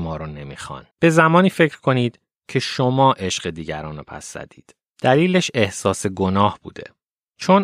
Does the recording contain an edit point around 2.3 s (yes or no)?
no